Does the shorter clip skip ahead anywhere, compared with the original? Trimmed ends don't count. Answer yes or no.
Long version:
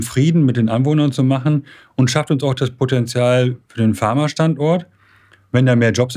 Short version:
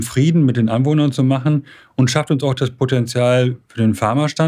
no